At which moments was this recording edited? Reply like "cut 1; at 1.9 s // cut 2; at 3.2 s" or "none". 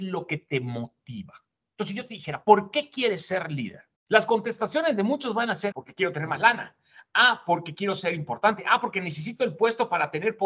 cut 1; at 4.0 s // cut 2; at 5.7 s

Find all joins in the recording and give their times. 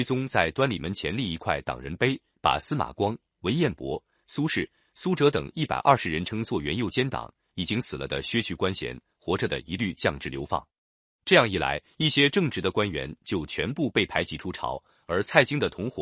none

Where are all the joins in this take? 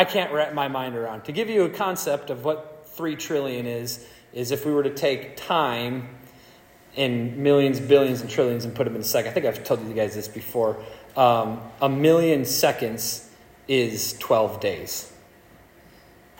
none

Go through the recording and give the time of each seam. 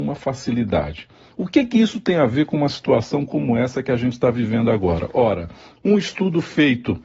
none

